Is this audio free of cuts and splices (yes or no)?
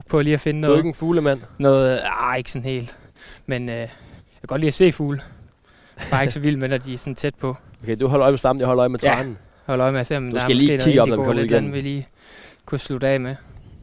yes